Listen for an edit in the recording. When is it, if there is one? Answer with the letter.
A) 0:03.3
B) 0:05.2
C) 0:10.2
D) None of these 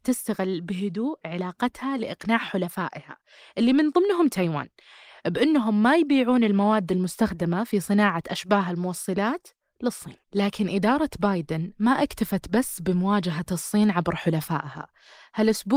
C